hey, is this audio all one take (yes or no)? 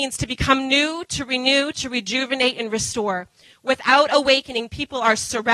yes